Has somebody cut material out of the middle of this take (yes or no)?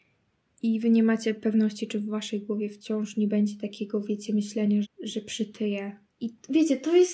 yes